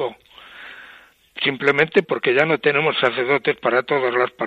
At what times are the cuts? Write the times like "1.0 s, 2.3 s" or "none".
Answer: 2.0 s